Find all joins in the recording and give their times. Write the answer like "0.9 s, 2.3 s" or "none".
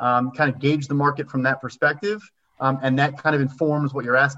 2.8 s